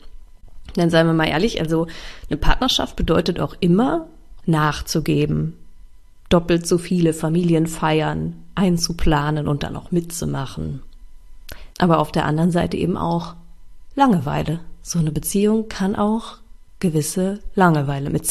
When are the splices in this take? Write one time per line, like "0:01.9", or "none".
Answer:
0:04.4
0:11.7